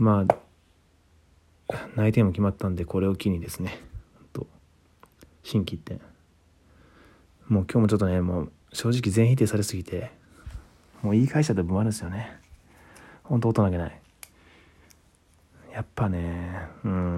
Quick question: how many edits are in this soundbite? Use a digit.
1